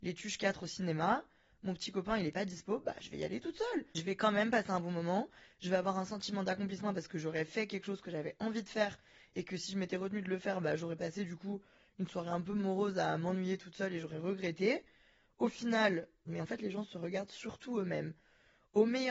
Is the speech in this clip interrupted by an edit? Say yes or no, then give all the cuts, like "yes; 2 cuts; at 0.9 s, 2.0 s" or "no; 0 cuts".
yes; 1 cut; at 16.3 s